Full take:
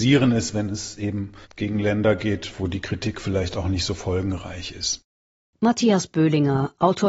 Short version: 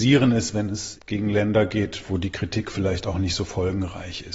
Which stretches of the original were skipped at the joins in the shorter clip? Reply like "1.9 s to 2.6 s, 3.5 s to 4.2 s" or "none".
1.0 s to 1.4 s